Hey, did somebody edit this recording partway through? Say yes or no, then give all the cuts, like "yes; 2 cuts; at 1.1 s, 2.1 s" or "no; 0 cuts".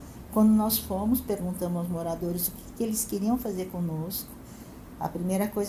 no; 0 cuts